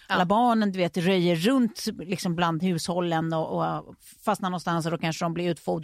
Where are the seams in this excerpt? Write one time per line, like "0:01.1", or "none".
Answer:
none